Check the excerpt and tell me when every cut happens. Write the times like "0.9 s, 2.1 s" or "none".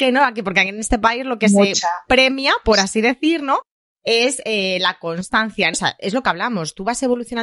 5.7 s